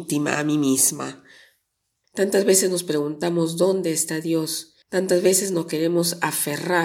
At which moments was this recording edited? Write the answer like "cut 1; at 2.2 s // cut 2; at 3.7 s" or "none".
cut 1; at 2.0 s // cut 2; at 4.8 s